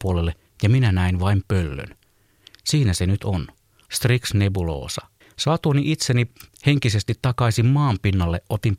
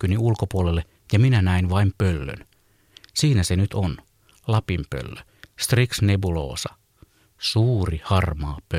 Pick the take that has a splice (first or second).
first